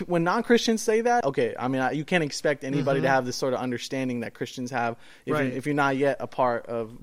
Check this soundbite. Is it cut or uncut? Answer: cut